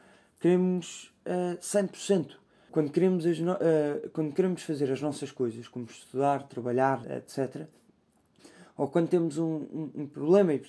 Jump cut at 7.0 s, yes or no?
yes